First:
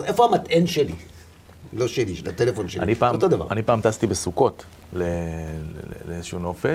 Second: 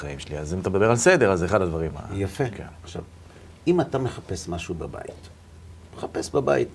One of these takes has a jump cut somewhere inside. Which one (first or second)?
second